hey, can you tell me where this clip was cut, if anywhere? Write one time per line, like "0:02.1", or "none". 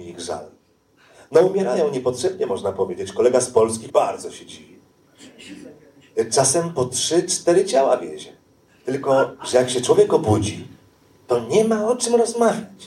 0:03.9
0:08.7